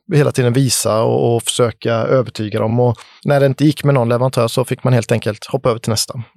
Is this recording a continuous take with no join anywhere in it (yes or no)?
yes